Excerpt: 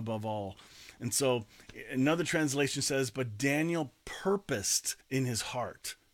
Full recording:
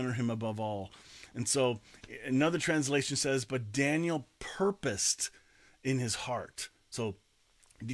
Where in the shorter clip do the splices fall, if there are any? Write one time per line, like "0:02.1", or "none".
0:05.0